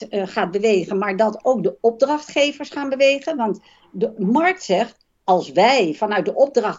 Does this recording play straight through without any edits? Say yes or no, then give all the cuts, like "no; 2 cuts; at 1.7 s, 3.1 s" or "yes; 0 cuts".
yes; 0 cuts